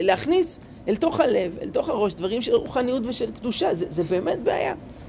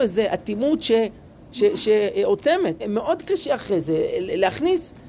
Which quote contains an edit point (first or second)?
second